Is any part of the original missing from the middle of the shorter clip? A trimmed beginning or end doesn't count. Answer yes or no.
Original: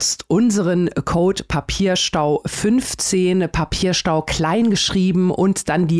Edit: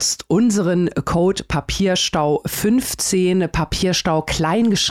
no